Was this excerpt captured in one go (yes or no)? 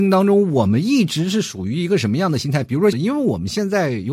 no